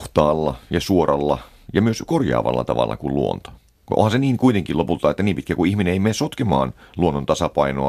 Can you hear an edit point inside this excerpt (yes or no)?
no